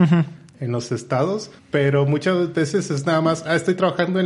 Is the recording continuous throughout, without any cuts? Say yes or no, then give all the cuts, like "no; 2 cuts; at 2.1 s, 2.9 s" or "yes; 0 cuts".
yes; 0 cuts